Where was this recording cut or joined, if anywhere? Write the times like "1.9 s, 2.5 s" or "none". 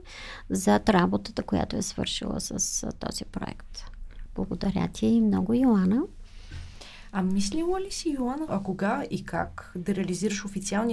4.3 s, 8.5 s